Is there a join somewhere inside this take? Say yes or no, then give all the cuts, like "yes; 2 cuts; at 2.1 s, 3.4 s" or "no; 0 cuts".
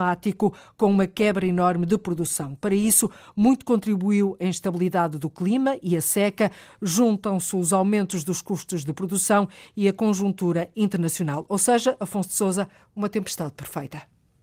no; 0 cuts